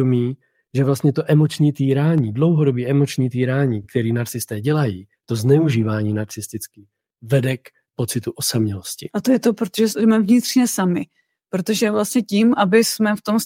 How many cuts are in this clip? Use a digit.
0